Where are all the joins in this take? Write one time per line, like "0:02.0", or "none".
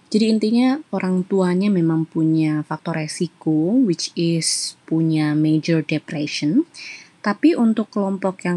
none